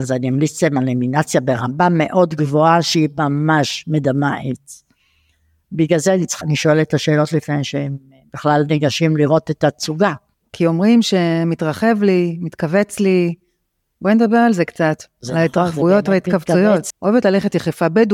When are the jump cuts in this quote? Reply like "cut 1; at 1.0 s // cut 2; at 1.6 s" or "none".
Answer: cut 1; at 6.4 s // cut 2; at 16.9 s

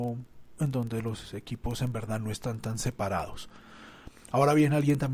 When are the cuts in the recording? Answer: none

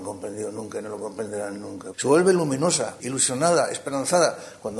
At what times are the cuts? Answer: cut 1; at 1.9 s // cut 2; at 3.0 s

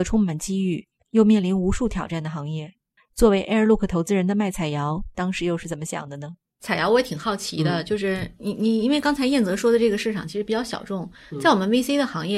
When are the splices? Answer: cut 1; at 3.0 s

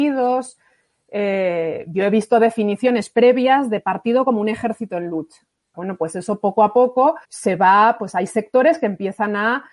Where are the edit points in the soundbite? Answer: cut 1; at 5.7 s // cut 2; at 7.2 s

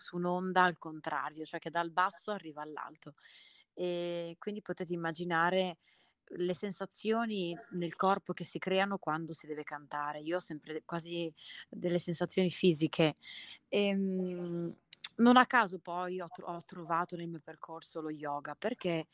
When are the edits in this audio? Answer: none

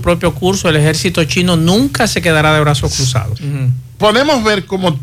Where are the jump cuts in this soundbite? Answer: cut 1; at 3.4 s

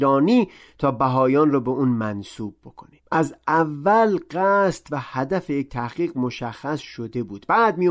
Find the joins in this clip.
cut 1; at 3.0 s

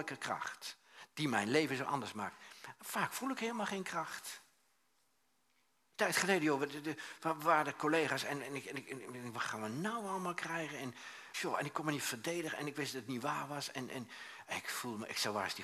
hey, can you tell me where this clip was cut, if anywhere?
cut 1; at 11.3 s

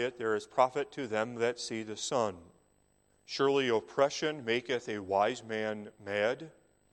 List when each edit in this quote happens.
cut 1; at 3.2 s

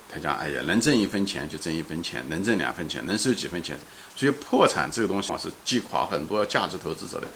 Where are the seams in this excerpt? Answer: cut 1; at 5.3 s

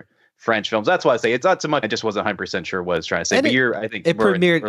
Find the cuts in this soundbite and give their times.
cut 1; at 1.8 s

